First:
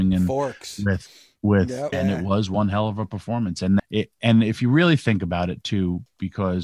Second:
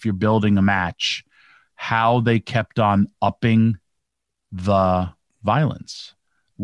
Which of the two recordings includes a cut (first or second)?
first